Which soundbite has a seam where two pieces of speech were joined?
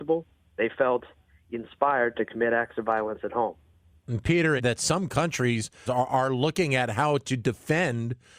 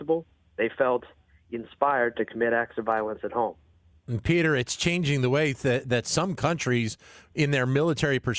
first; 2 cuts; at 4.6 s, 5.9 s

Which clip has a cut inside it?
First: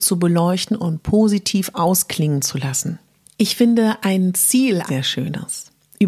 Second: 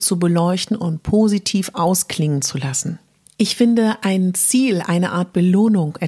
first; 1 cut; at 4.9 s

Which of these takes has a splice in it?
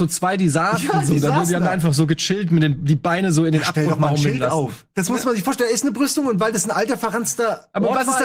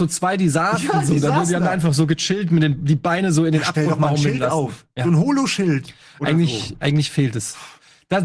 first; 1 cut; at 4.9 s

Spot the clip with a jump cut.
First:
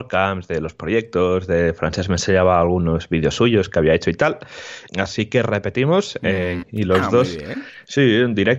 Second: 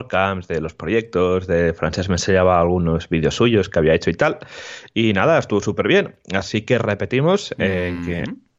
first; 2 cuts; at 4.9 s, 6.6 s

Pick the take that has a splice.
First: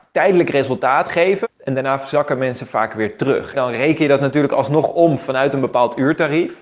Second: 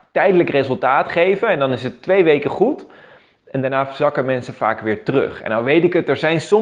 first; 2 cuts; at 1.4 s, 3.5 s

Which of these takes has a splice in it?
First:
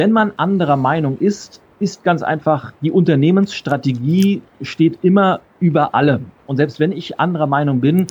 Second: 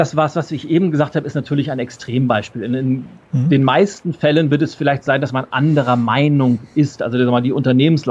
first; 1 cut; at 2.8 s

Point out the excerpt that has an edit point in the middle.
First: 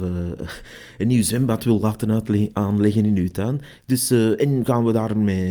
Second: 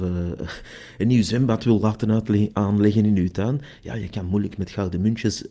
first; 1 cut; at 3.8 s

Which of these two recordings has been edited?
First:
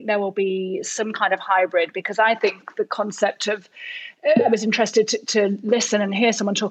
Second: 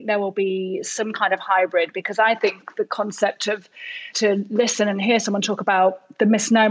second; 1 cut; at 4.1 s

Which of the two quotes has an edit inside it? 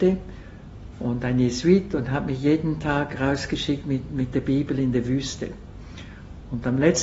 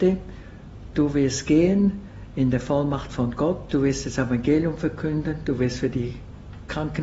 first; 1 cut; at 0.9 s

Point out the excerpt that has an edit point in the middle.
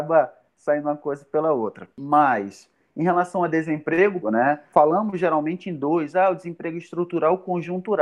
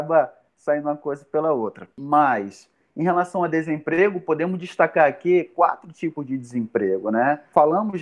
first; 1 cut; at 4.2 s

